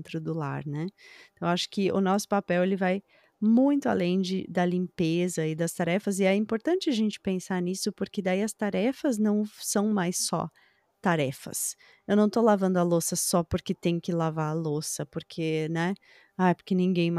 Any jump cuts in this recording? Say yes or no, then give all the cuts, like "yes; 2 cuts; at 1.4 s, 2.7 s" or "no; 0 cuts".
no; 0 cuts